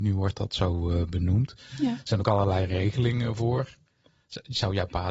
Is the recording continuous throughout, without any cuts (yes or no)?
yes